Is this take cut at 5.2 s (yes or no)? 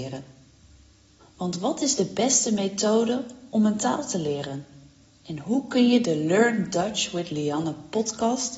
no